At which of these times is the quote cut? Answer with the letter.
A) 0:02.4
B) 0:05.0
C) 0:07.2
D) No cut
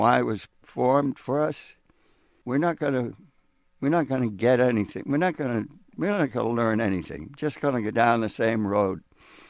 A